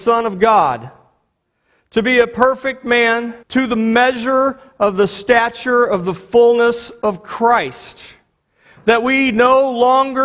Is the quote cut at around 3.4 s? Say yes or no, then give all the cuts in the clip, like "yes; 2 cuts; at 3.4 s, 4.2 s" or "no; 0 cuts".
yes; 1 cut; at 3.4 s